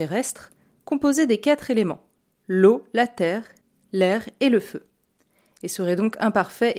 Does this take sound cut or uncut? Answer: uncut